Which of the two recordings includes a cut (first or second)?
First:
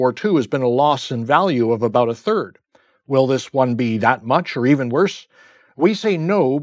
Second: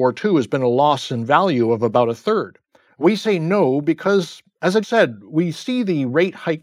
second